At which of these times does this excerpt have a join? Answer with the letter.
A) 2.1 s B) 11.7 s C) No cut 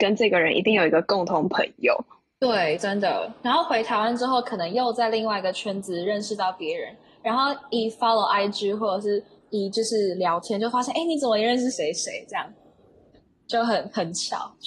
B